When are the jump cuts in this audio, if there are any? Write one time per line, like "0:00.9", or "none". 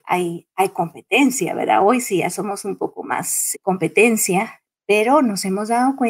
0:03.5